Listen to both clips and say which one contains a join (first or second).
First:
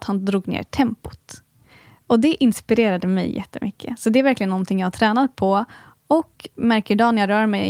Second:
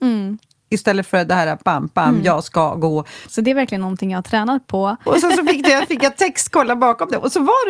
second